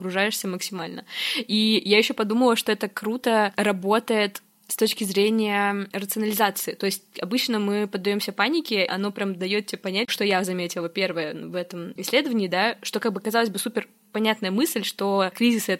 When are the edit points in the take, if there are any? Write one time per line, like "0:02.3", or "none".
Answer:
0:08.9
0:10.1